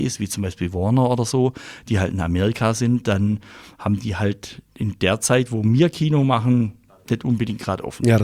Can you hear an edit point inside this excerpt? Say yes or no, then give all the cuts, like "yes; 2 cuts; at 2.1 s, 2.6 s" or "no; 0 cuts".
no; 0 cuts